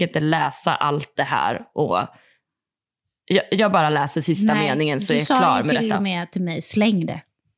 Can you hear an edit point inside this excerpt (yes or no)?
no